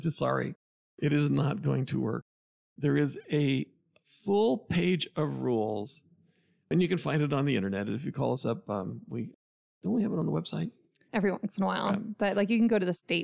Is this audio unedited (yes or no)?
no